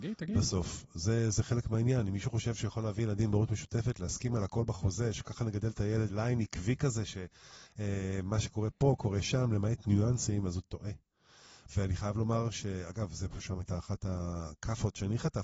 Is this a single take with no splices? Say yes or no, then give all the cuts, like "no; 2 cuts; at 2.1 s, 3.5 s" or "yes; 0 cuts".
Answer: no; 2 cuts; at 6.1 s, 11.7 s